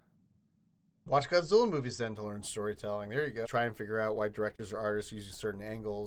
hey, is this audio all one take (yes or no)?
no